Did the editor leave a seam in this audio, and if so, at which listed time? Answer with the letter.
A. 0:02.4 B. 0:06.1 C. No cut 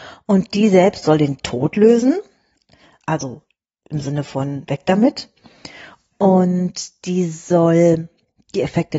B